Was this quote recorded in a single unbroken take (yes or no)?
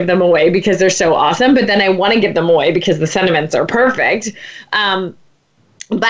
yes